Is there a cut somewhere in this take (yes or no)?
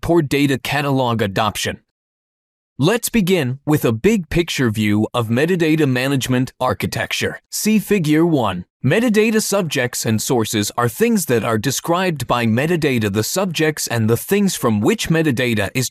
yes